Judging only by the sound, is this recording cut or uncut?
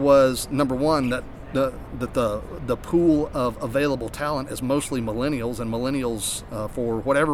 uncut